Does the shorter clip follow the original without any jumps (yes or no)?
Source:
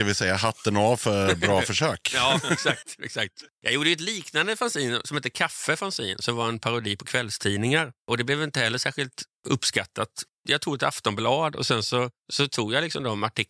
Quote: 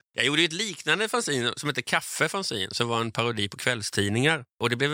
yes